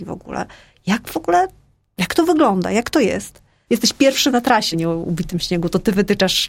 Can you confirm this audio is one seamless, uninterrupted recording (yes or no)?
no